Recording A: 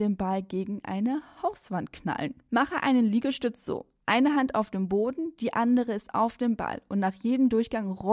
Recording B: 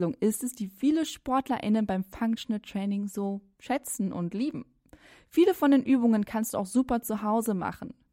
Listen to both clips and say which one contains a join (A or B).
A